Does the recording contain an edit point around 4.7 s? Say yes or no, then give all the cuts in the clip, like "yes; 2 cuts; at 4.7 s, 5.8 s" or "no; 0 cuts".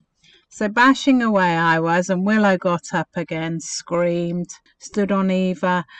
yes; 1 cut; at 4.7 s